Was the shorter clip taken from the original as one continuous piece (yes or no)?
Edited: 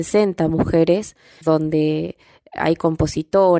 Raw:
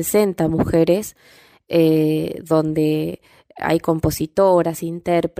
no